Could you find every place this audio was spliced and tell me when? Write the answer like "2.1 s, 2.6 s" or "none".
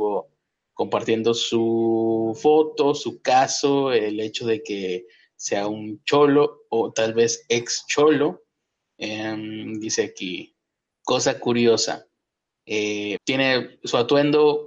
10.9 s, 13.2 s